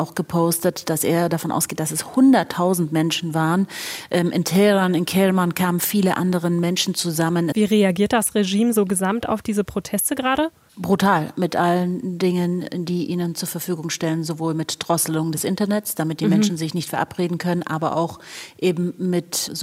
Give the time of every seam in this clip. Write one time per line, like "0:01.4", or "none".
0:07.5